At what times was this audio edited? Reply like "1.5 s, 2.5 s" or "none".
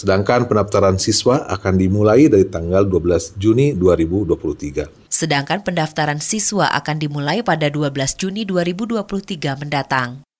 5.1 s